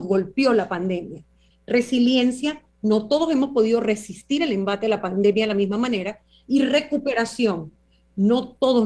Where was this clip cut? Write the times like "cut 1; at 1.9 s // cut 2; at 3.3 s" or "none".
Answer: cut 1; at 1.5 s